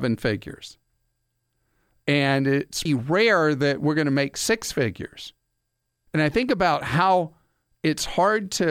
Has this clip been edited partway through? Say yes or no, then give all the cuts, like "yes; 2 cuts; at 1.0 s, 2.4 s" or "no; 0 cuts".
yes; 2 cuts; at 2.9 s, 6.1 s